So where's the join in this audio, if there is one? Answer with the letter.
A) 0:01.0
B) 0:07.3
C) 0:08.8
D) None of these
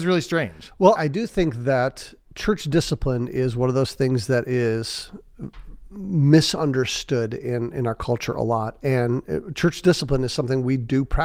A